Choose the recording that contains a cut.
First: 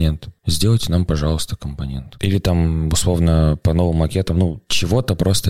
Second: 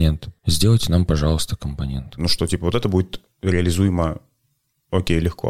second; 1 cut; at 2.2 s

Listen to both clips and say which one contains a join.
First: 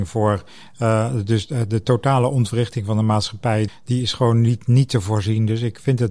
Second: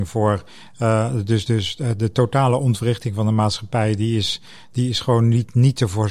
first; 2 cuts; at 1.5 s, 3.7 s

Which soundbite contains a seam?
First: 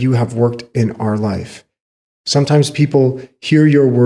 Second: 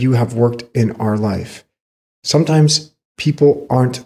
first; 1 cut; at 2.0 s

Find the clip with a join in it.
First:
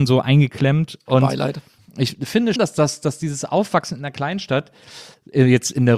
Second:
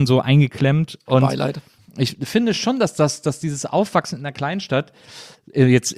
first; 1 cut; at 2.6 s

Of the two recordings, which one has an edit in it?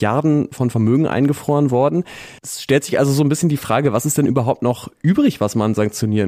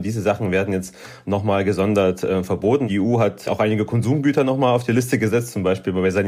first; 1 cut; at 2.4 s

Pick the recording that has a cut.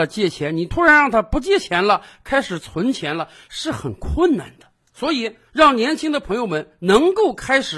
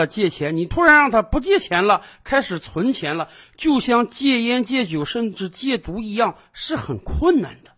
first; 2 cuts; at 3.5 s, 5.5 s

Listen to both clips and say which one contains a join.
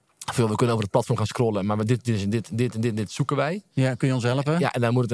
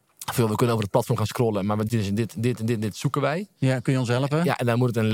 second; 1 cut; at 1.9 s

